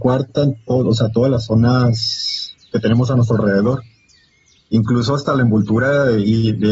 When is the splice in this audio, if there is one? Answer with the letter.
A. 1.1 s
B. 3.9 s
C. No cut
C